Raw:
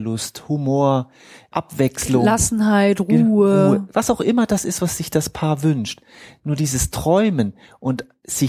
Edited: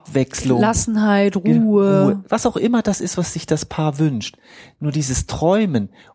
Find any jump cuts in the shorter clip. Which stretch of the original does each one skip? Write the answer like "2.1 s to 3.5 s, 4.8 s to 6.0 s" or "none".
none